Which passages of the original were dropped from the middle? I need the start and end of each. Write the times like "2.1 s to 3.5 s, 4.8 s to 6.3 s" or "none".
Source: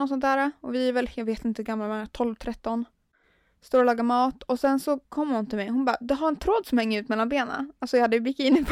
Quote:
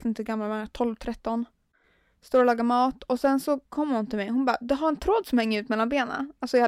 none